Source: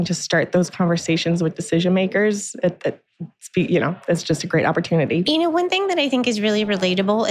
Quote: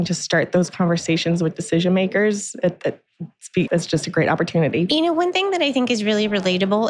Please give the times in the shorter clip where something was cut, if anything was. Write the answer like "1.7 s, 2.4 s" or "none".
3.7 s